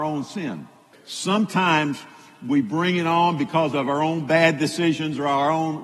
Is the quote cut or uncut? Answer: cut